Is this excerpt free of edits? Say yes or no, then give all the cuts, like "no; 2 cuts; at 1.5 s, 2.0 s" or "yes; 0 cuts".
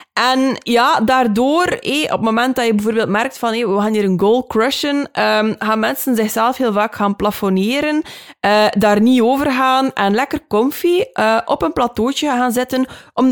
yes; 0 cuts